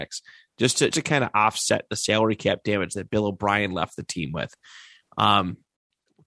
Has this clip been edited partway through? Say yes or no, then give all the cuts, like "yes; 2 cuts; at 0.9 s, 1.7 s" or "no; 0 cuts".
yes; 1 cut; at 0.9 s